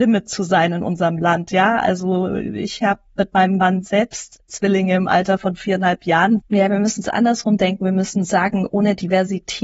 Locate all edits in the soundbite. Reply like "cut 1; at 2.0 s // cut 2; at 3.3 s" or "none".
cut 1; at 6.4 s